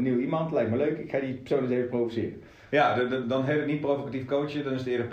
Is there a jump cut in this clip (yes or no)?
yes